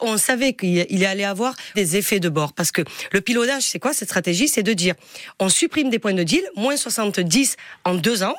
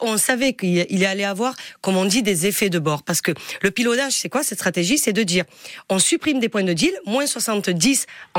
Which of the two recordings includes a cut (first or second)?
first